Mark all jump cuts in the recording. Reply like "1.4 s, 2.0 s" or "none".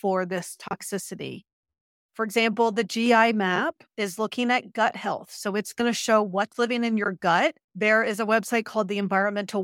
7.7 s